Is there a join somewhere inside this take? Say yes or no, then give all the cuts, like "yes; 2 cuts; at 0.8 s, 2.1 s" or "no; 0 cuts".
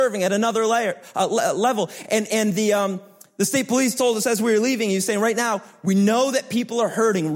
no; 0 cuts